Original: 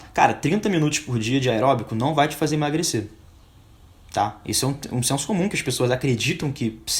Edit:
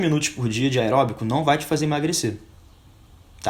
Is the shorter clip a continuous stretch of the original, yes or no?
yes